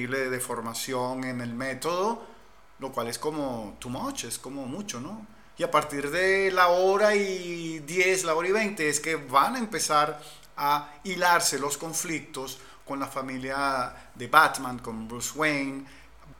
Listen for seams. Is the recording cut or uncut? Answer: uncut